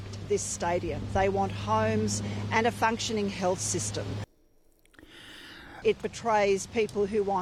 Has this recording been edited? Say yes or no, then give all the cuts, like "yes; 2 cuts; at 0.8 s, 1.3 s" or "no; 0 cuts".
yes; 1 cut; at 5.8 s